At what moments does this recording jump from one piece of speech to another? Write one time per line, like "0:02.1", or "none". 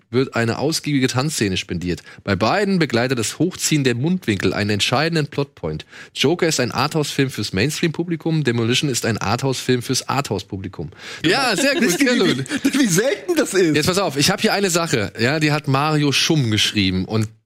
0:11.2